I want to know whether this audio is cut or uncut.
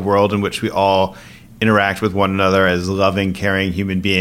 uncut